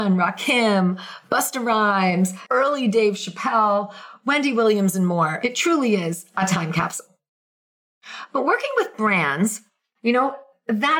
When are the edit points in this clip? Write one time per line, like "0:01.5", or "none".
0:02.5